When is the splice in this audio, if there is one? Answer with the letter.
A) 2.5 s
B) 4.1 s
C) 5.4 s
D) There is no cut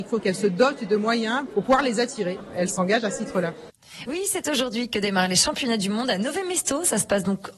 B